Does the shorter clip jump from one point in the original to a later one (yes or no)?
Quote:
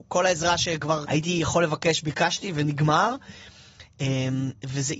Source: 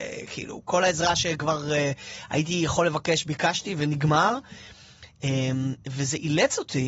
yes